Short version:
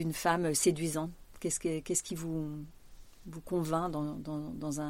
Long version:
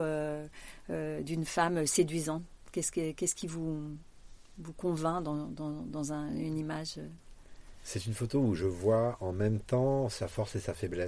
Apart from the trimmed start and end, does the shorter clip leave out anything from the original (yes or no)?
no